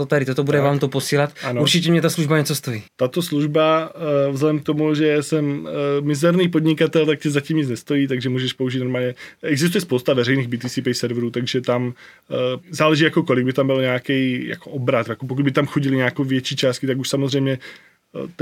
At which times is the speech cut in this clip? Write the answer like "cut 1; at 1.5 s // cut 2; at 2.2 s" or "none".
cut 1; at 2.9 s // cut 2; at 12.6 s

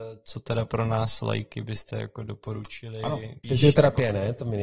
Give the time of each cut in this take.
cut 1; at 3.4 s

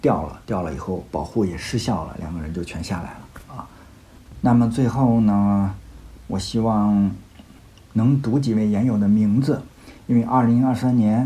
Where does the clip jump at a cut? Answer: none

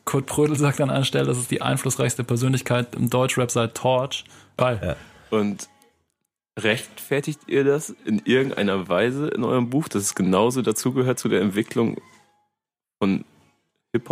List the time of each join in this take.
cut 1; at 4.6 s

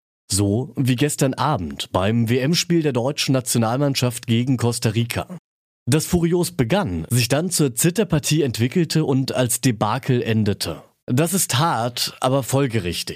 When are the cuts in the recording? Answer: cut 1; at 11.0 s

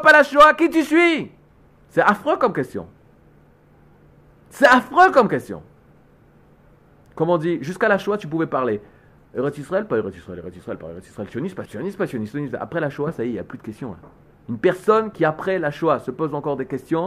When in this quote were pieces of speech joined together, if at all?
cut 1; at 11.7 s

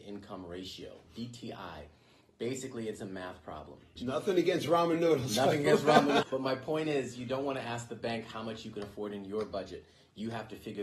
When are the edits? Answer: cut 1; at 4.0 s // cut 2; at 6.2 s

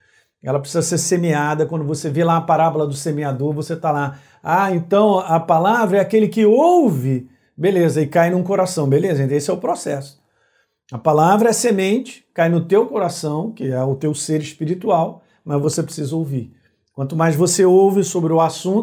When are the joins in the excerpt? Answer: none

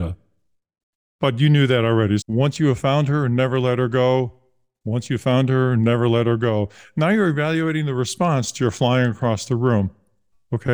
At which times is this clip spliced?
cut 1; at 2.2 s

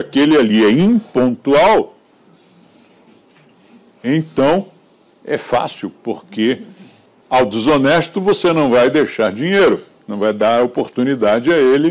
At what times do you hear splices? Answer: none

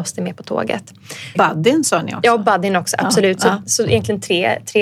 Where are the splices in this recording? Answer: cut 1; at 1.4 s

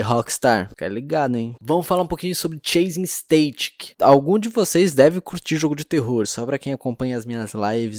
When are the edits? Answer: cut 1; at 1.6 s // cut 2; at 6.2 s

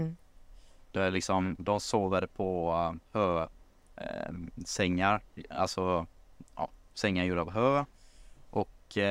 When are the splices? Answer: cut 1; at 3.1 s

